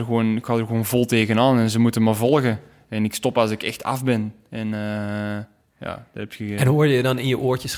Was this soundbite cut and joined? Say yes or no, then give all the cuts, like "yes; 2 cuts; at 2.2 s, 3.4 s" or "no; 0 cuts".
no; 0 cuts